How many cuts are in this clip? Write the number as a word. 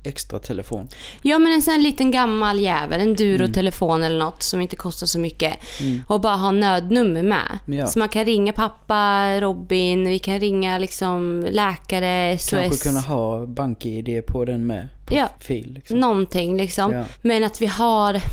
zero